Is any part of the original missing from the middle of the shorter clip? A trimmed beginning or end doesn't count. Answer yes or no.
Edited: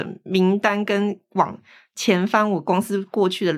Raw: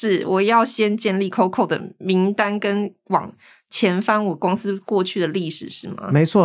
no